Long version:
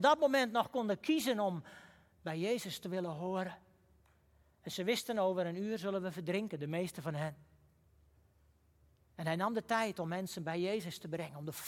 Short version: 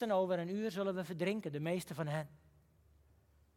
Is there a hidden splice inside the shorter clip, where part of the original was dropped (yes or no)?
no